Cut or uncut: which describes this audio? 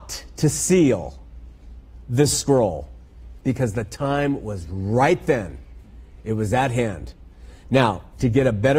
cut